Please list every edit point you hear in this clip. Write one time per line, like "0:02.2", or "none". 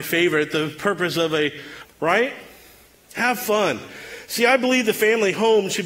0:01.8